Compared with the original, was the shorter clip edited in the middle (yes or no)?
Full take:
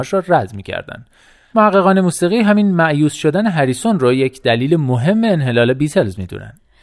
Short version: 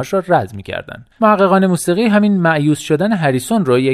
yes